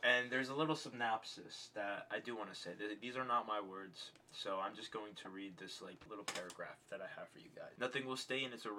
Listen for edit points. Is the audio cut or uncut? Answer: cut